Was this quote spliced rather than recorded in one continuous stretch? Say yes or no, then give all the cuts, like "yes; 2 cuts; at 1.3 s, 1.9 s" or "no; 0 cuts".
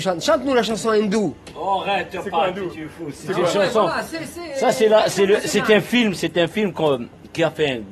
no; 0 cuts